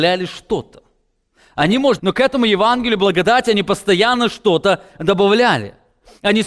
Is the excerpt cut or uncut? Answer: cut